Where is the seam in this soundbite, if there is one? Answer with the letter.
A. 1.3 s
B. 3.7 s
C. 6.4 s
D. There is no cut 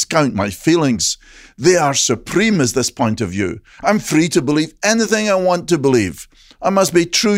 D